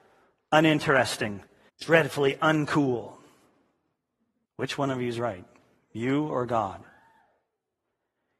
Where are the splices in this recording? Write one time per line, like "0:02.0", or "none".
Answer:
0:01.7
0:04.4